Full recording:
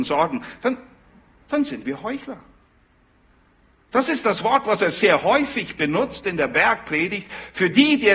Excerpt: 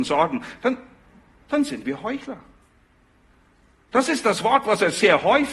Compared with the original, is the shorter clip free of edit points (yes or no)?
yes